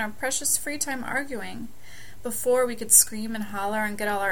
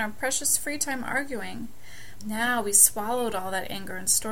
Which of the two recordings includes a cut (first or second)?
second